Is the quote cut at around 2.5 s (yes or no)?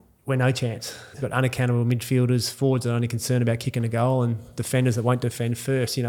no